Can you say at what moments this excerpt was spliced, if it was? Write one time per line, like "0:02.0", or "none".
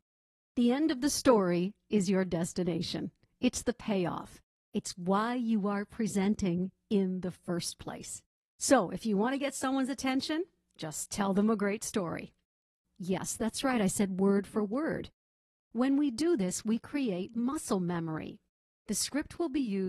0:12.8